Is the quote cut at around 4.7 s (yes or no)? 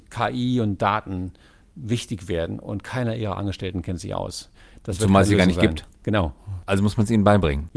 yes